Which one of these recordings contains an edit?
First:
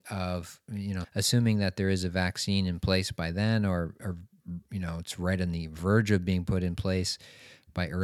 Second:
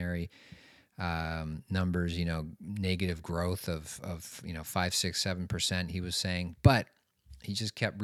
first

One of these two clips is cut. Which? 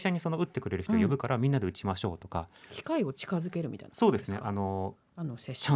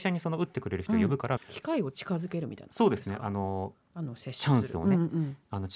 second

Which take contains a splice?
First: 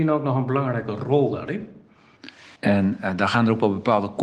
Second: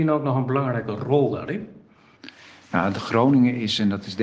first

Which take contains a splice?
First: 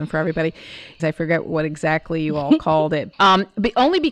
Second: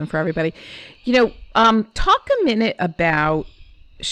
first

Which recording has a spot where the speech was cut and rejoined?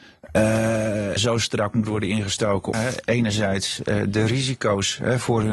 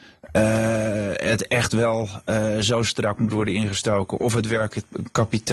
first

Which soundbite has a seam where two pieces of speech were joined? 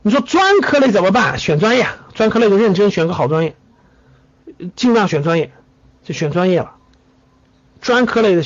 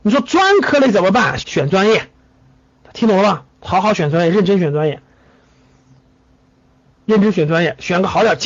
second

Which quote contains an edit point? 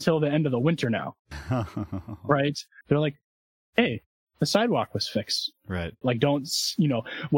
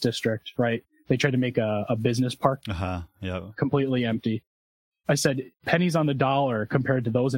first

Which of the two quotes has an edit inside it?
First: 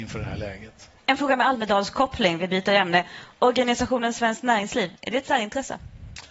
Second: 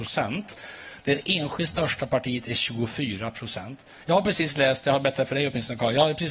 first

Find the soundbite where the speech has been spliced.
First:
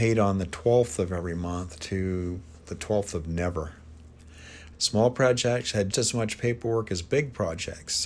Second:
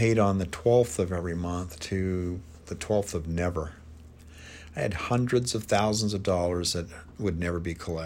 first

